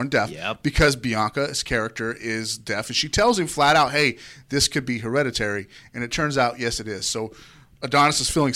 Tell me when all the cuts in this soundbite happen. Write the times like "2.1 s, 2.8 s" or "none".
none

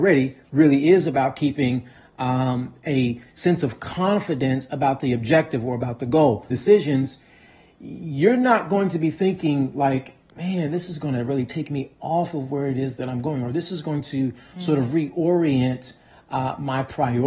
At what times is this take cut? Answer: 6.5 s

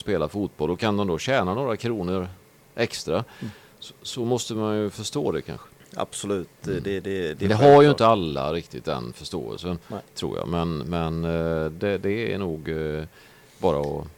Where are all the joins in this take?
7.3 s

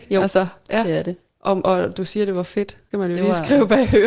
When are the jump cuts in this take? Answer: none

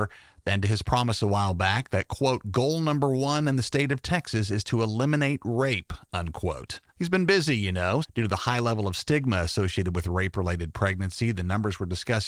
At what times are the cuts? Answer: 6.9 s, 8.0 s

